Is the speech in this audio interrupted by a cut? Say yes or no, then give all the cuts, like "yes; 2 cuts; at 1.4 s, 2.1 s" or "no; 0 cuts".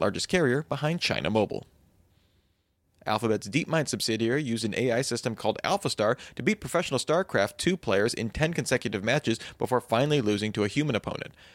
no; 0 cuts